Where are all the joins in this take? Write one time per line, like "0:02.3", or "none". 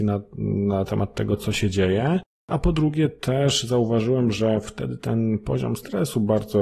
none